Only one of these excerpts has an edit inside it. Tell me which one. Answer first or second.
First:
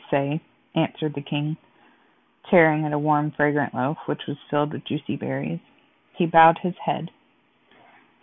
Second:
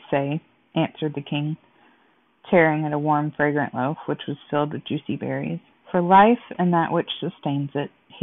second